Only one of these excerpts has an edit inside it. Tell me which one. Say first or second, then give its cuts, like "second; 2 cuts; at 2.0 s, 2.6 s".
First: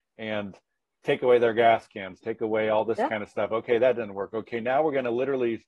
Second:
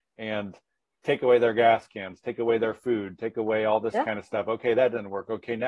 first; 1 cut; at 2.2 s